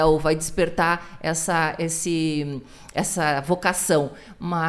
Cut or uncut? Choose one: uncut